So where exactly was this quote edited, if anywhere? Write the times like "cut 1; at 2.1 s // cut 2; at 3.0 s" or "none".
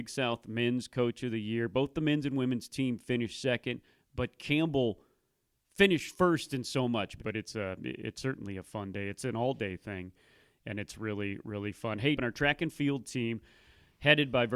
cut 1; at 7.2 s // cut 2; at 12.1 s